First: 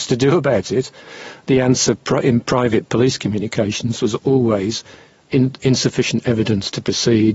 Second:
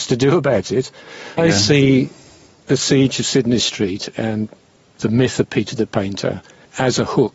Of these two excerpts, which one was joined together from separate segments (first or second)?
second